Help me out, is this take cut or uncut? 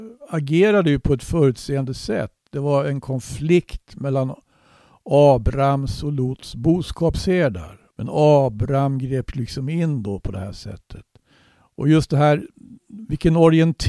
cut